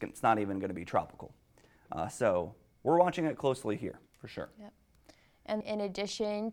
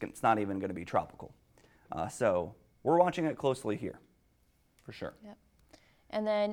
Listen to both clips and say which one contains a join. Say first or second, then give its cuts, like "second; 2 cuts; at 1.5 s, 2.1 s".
first; 2 cuts; at 4.1 s, 5.6 s